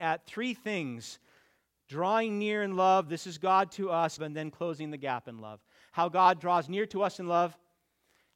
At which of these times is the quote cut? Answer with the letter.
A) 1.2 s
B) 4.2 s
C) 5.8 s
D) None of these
B